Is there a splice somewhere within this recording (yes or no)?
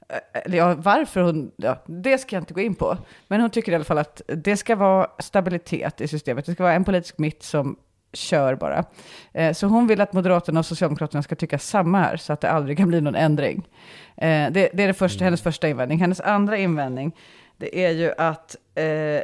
no